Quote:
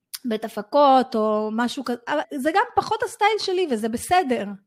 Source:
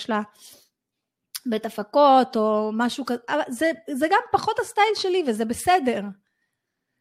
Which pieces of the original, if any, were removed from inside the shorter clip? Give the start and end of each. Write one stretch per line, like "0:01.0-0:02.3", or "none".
0:03.5-0:03.8